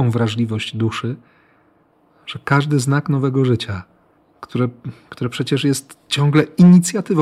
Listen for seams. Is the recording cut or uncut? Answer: uncut